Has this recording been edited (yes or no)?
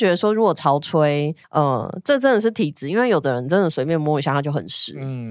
yes